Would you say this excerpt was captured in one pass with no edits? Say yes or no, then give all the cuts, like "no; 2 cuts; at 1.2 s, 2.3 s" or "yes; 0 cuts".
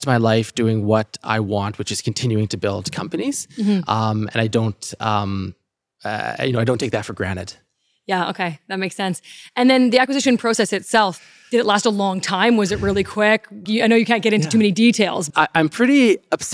no; 2 cuts; at 13.7 s, 15.3 s